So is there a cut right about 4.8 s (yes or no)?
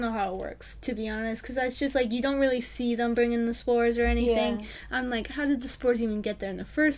no